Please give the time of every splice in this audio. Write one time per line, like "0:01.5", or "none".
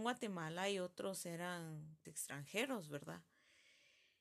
0:02.0